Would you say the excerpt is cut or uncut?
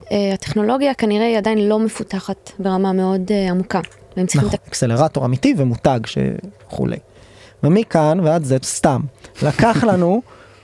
cut